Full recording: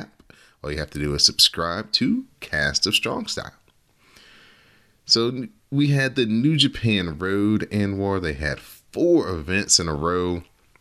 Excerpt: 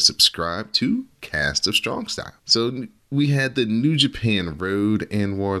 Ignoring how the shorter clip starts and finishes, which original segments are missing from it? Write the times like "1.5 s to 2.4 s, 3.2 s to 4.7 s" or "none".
3.6 s to 5.0 s